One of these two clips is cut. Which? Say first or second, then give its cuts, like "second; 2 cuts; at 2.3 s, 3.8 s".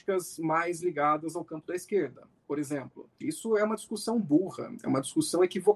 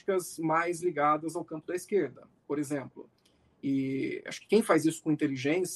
first; 1 cut; at 3.2 s